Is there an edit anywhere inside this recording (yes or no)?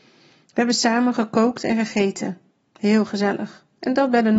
no